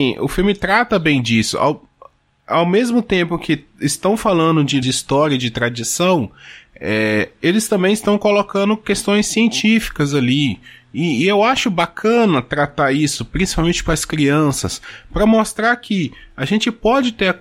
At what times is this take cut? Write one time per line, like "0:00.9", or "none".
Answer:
0:04.8